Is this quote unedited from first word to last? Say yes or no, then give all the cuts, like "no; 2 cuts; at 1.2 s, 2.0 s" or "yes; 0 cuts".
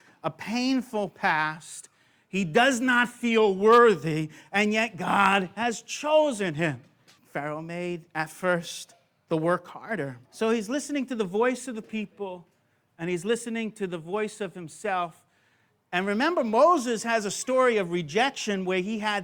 no; 2 cuts; at 7.2 s, 10.2 s